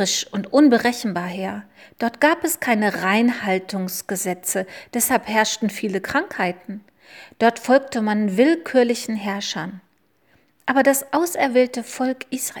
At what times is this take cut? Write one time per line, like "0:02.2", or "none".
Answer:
none